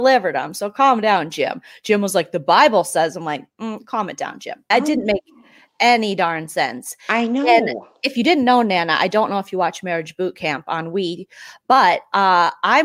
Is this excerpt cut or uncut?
cut